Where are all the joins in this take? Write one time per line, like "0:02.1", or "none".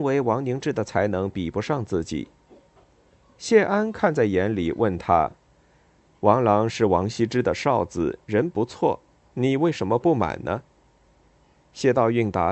0:03.2

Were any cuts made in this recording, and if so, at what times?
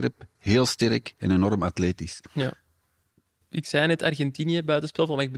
none

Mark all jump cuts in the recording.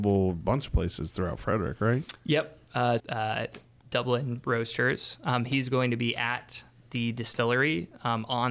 0:03.0

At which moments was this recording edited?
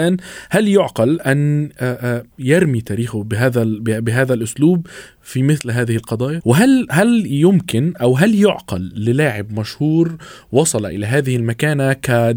0:02.3
0:06.4

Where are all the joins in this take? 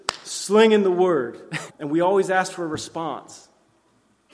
0:01.7

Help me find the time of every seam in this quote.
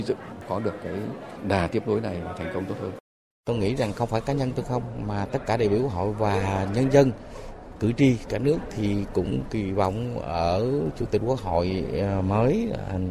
0:03.3

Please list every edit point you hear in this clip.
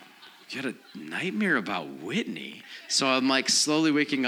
none

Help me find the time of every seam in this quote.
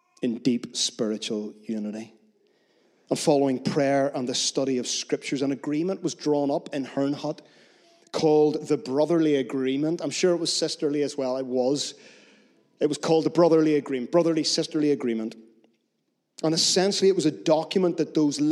none

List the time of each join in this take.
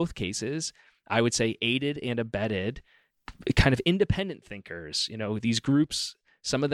none

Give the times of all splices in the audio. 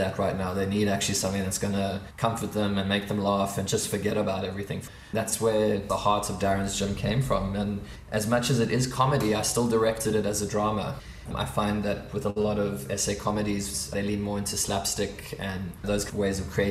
none

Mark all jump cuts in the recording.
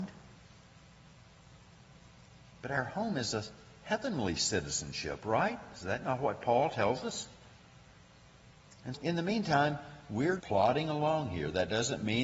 0:08.9
0:10.4

